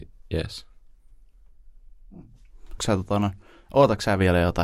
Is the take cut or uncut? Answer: cut